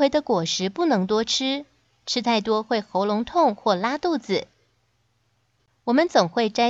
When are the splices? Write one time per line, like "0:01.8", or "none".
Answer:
0:05.7